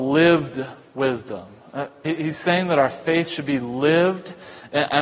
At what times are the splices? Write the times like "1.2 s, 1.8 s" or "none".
2.0 s